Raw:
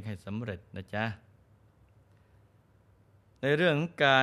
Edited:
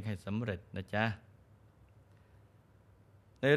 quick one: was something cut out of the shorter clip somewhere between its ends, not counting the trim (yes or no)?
no